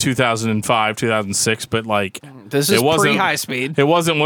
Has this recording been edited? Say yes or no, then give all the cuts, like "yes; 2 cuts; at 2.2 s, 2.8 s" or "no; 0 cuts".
no; 0 cuts